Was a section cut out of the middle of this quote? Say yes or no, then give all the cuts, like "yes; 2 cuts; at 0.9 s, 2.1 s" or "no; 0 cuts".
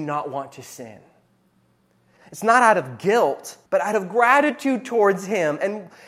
yes; 2 cuts; at 2.2 s, 3.7 s